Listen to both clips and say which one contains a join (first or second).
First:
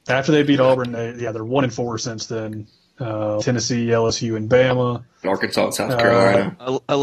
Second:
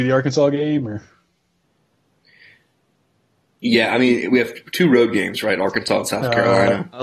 first